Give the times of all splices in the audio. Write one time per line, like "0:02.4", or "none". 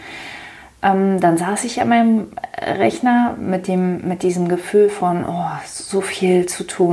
none